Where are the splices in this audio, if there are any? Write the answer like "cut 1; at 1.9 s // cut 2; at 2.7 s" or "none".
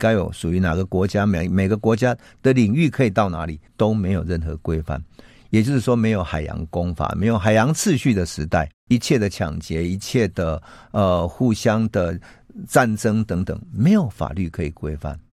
cut 1; at 3.7 s